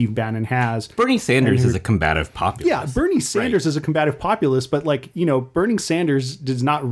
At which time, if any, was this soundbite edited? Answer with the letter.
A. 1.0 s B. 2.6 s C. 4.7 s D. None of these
D